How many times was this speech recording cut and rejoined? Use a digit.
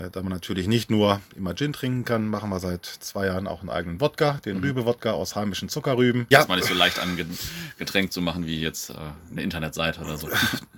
1